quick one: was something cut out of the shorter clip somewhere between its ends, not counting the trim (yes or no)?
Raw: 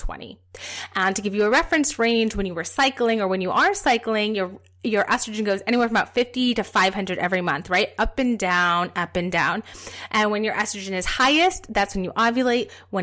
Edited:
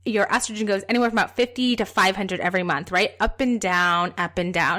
no